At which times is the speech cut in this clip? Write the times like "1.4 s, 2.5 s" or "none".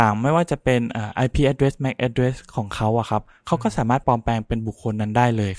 4.0 s